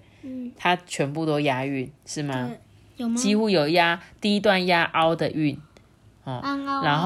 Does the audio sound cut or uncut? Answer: cut